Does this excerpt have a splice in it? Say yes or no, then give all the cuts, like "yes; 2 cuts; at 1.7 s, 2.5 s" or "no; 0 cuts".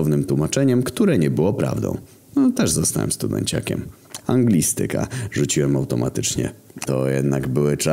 yes; 2 cuts; at 4.2 s, 6.8 s